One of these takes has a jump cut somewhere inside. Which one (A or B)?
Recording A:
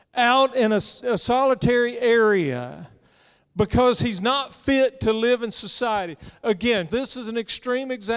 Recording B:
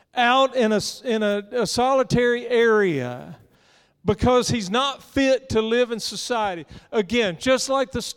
A